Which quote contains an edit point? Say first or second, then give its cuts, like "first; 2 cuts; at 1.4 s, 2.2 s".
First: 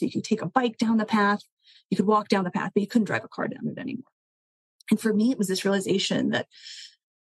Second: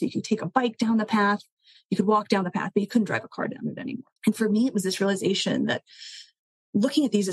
second; 1 cut; at 4.2 s